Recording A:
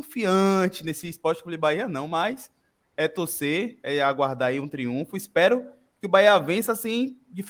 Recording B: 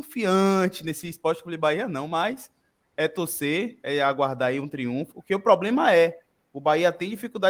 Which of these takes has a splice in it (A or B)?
B